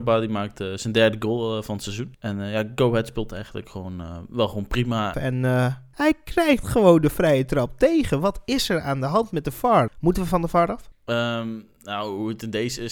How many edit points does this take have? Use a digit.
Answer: 2